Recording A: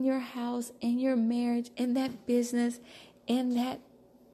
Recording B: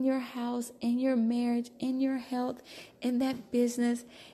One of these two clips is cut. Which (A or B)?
A